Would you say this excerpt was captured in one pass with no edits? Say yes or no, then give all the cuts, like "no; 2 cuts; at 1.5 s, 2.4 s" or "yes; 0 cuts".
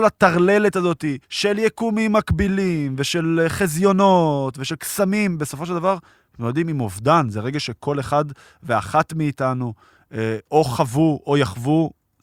no; 1 cut; at 1.2 s